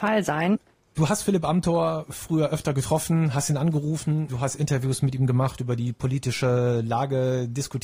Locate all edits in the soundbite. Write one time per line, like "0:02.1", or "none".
0:04.3